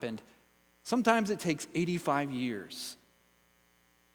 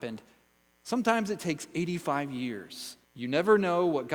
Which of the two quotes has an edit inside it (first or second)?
second